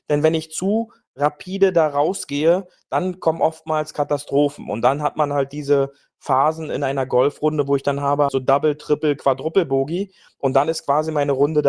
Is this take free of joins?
no; 1 cut; at 8.3 s

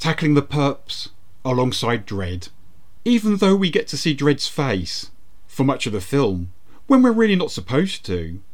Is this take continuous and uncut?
no; 1 cut; at 3.0 s

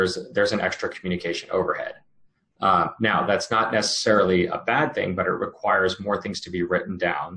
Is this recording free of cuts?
yes; 0 cuts

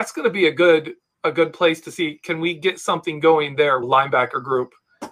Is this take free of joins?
no; 1 cut; at 3.8 s

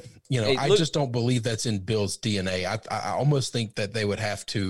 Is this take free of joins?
yes; 0 cuts

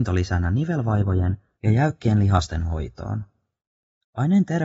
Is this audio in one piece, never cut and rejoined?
yes; 0 cuts

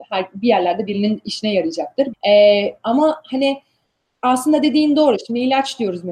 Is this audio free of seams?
no; 1 cut; at 2.1 s

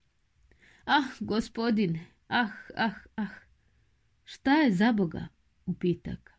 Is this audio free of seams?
yes; 0 cuts

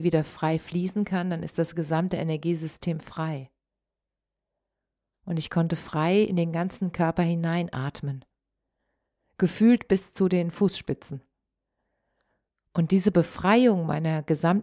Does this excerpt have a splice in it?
yes; 1 cut; at 5.1 s

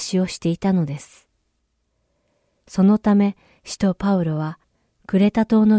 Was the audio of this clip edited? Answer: no; 0 cuts

